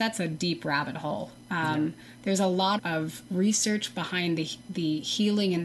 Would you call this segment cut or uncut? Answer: cut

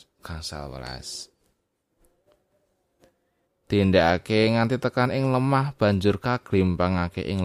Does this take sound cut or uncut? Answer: cut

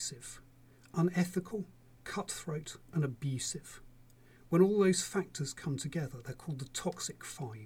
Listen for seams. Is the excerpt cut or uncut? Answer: uncut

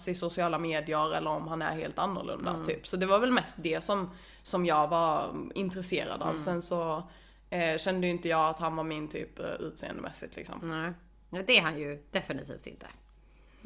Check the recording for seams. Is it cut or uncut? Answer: uncut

